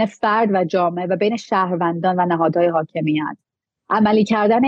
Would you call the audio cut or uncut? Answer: uncut